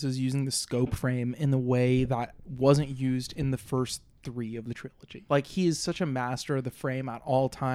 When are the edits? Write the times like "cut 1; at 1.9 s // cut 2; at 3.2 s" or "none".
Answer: cut 1; at 5.3 s